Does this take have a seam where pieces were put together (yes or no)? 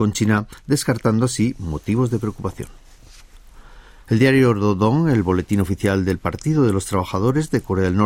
no